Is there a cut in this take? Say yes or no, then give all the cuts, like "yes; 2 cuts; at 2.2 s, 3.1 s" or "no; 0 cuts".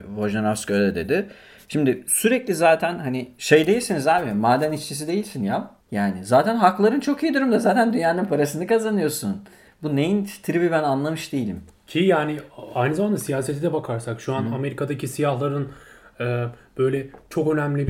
yes; 1 cut; at 5.8 s